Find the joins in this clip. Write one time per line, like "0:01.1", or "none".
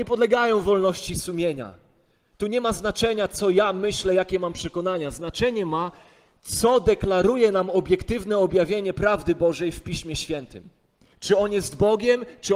0:11.1